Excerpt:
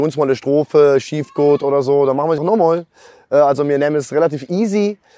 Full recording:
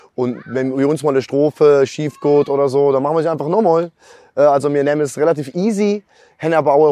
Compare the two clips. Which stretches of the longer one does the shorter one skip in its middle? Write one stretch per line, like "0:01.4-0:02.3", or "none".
0:03.2-0:03.4